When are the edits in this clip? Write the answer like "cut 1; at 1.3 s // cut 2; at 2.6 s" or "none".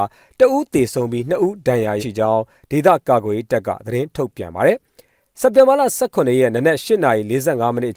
cut 1; at 2.0 s